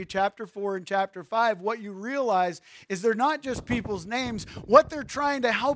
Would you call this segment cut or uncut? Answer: uncut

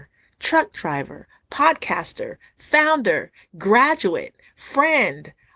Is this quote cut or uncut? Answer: uncut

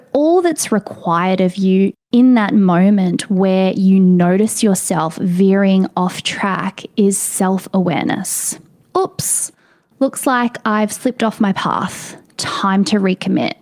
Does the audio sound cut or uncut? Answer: uncut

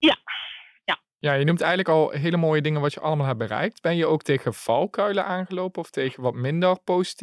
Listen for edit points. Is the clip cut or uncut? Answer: uncut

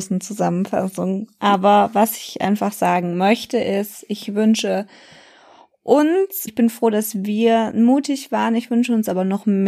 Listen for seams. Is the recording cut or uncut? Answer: cut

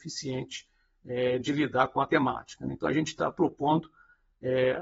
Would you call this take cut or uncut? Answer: uncut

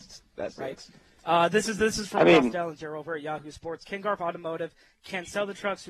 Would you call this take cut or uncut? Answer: uncut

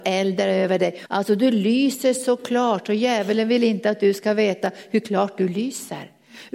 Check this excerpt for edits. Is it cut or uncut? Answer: cut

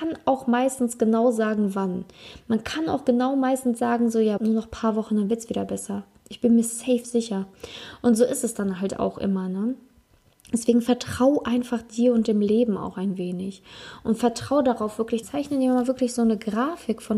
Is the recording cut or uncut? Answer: cut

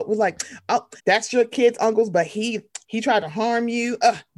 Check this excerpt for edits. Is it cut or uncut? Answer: cut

